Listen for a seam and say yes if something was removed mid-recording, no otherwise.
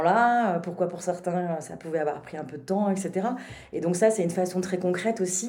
no